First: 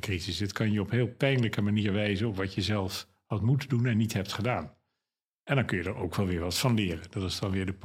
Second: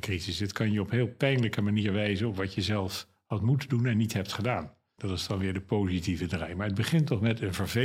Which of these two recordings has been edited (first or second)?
second